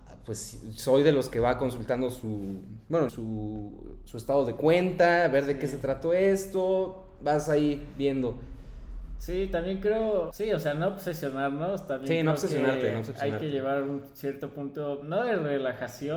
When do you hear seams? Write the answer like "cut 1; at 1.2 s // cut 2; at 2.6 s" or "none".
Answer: cut 1; at 3.1 s // cut 2; at 10.3 s

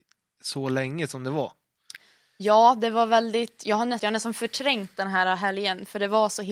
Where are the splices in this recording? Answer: cut 1; at 4.0 s

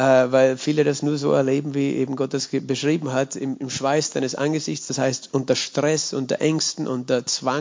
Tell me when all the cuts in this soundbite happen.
none

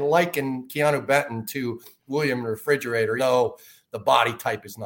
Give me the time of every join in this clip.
cut 1; at 3.2 s

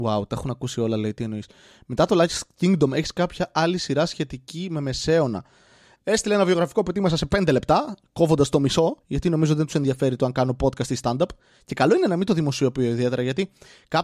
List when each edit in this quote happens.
cut 1; at 5.9 s // cut 2; at 9.0 s

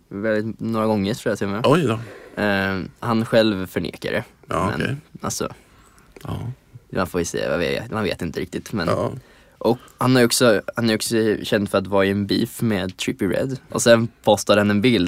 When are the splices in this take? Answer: cut 1; at 9.9 s // cut 2; at 13.7 s

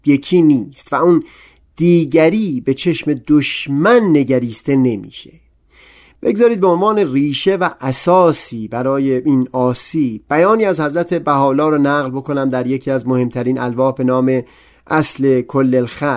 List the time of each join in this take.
none

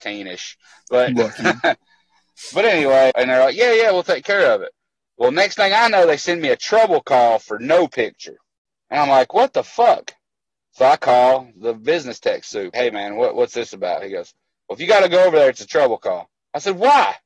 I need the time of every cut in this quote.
cut 1; at 3.1 s // cut 2; at 12.7 s

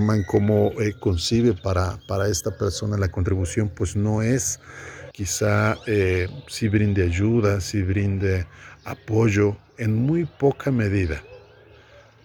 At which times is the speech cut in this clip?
cut 1; at 5.1 s

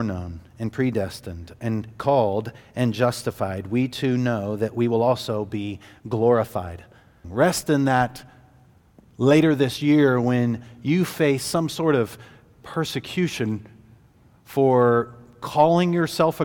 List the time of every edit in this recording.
cut 1; at 7.2 s

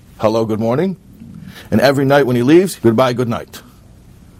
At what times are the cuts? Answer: cut 1; at 2.8 s

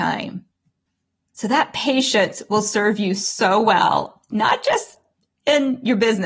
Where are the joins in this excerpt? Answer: none

